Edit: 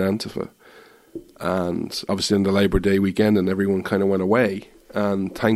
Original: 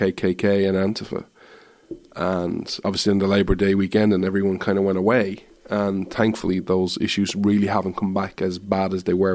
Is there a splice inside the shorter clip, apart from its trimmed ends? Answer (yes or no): no